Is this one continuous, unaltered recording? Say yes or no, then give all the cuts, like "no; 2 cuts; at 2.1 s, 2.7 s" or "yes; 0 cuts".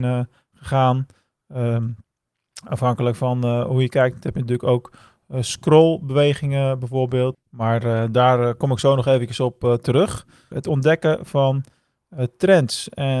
no; 2 cuts; at 7.3 s, 10.5 s